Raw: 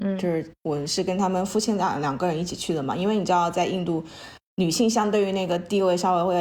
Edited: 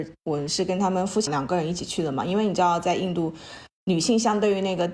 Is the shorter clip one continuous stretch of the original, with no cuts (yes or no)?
no